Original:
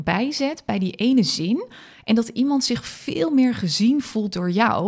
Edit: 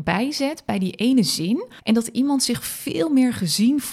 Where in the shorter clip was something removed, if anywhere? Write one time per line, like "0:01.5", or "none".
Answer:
0:01.8